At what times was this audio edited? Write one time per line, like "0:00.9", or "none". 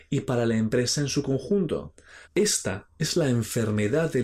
0:02.2

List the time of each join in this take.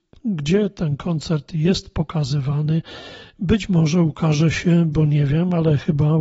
none

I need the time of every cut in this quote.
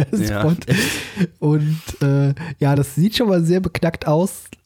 none

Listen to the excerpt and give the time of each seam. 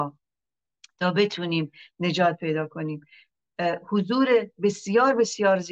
none

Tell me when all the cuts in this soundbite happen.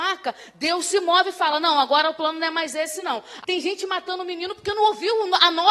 0:03.4

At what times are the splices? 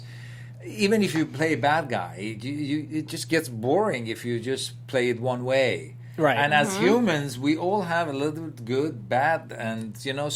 none

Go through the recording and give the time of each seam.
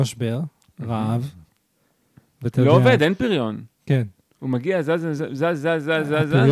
none

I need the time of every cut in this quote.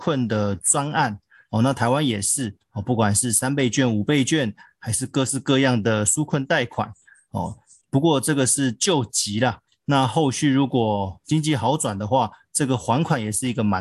none

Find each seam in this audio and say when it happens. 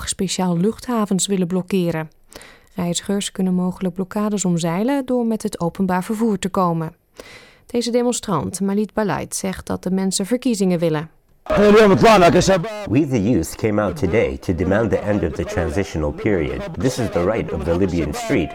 0:07.6
0:16.7

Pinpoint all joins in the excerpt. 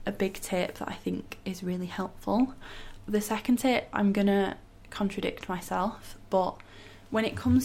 none

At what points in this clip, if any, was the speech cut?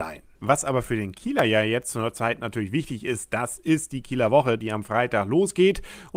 none

